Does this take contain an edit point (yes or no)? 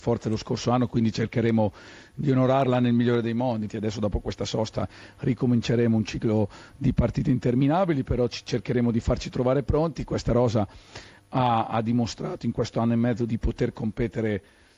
yes